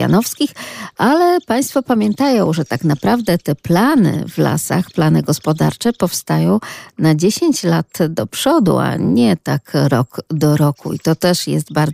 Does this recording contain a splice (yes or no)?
no